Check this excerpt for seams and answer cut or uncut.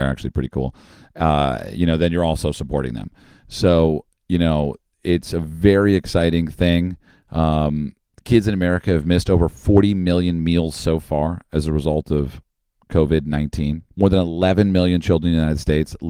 cut